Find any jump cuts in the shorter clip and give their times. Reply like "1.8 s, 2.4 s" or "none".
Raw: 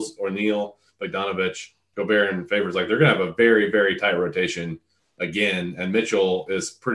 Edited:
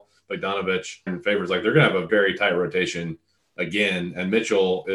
1.1 s, 2.1 s